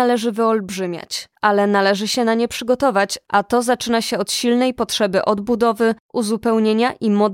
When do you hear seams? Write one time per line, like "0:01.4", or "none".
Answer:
none